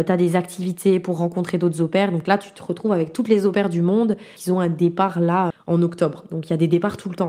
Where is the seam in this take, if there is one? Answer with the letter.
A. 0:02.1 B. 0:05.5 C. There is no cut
B